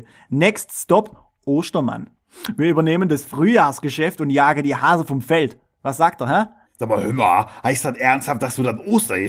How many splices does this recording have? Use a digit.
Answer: 0